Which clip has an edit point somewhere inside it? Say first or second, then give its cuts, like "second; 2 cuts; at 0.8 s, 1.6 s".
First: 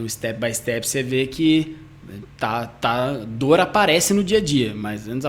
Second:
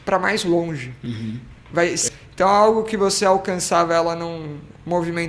second; 1 cut; at 2.1 s